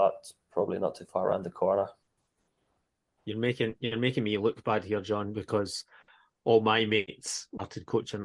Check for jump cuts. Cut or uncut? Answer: uncut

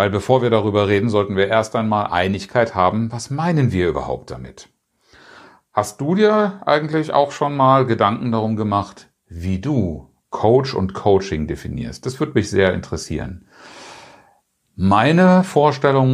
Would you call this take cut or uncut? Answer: uncut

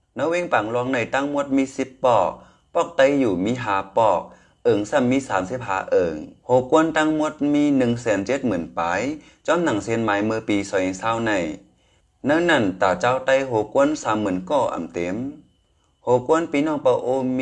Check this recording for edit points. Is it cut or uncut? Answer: cut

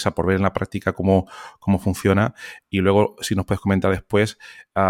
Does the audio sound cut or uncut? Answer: uncut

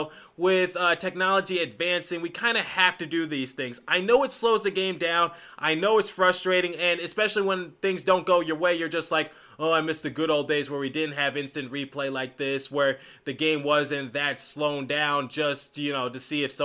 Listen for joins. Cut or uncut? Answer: uncut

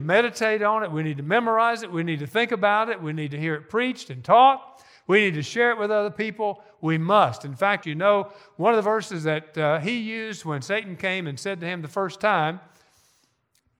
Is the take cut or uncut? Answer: cut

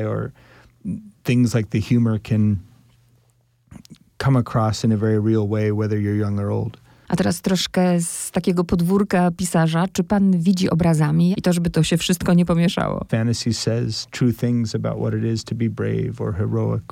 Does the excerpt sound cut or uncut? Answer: cut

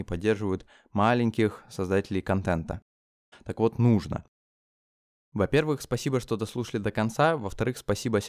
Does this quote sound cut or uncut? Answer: cut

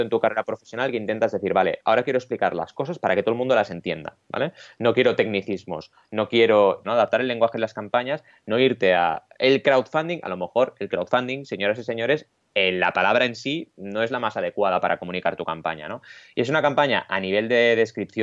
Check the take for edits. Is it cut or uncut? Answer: cut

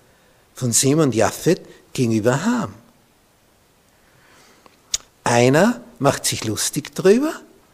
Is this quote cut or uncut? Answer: cut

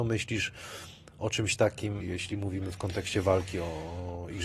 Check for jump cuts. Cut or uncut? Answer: cut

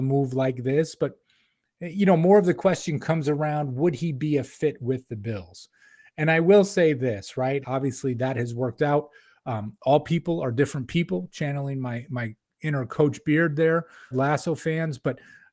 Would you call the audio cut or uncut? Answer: cut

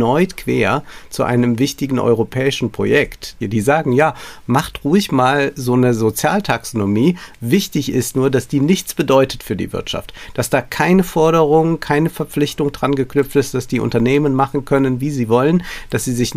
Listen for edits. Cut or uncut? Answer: cut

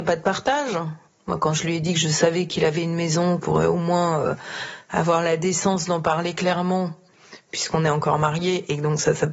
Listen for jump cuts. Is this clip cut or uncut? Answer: cut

